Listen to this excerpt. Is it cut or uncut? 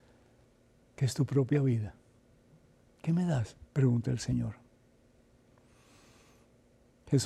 cut